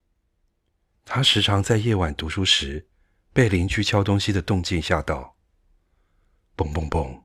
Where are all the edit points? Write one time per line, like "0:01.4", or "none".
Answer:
0:00.9